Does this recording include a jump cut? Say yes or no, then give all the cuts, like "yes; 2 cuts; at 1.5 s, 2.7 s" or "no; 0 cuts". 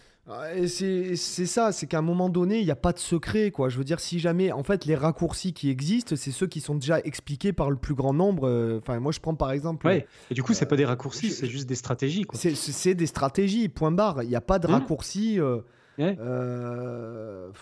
no; 0 cuts